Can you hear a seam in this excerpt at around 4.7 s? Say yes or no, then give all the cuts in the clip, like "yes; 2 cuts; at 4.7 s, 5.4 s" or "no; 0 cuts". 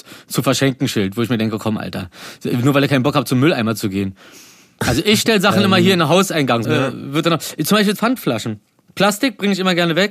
no; 2 cuts; at 6.6 s, 8.0 s